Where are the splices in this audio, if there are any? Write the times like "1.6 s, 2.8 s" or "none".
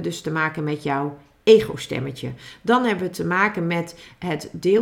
none